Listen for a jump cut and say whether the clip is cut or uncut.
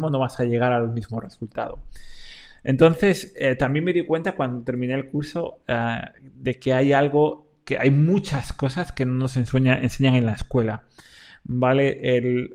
uncut